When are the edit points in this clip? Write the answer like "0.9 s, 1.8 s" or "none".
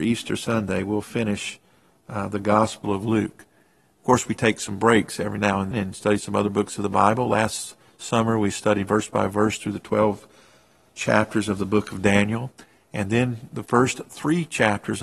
5.7 s